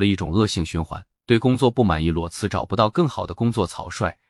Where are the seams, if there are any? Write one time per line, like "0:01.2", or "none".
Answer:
none